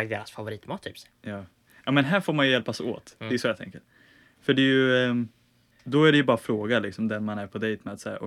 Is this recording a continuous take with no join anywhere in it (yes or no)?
yes